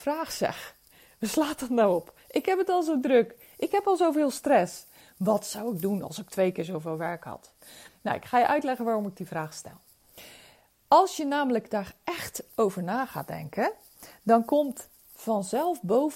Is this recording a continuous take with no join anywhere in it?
yes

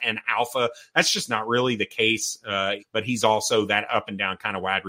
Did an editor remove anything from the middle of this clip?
yes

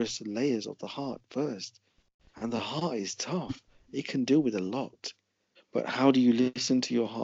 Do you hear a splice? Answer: yes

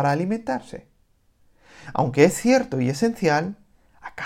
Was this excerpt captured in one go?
no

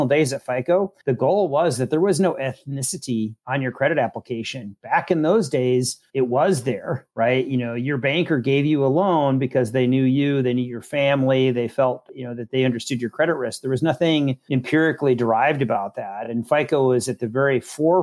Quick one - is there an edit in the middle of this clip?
no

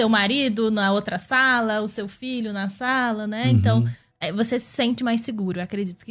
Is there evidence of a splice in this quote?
no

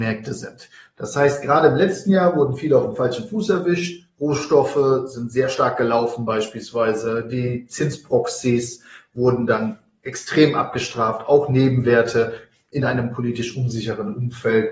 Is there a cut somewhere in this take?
no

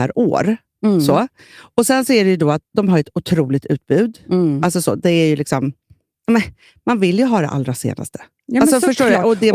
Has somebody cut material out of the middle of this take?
no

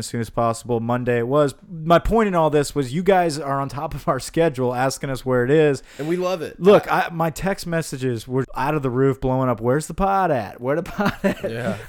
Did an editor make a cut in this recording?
yes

